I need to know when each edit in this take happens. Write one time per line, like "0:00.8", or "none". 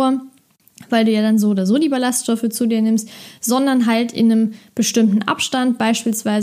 none